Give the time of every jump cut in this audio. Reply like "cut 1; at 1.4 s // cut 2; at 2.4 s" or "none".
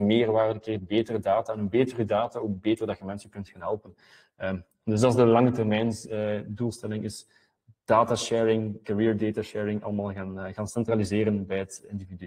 none